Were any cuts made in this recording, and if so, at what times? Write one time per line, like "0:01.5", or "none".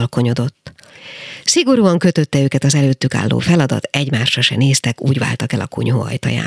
none